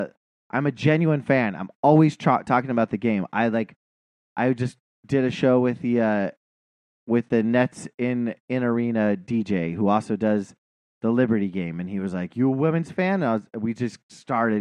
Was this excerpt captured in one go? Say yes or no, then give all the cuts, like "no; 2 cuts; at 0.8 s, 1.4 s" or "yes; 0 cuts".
yes; 0 cuts